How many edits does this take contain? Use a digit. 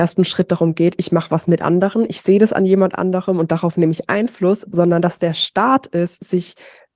0